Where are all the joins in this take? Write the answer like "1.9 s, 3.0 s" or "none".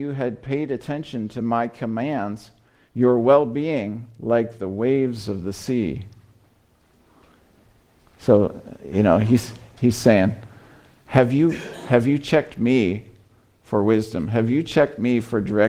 2.9 s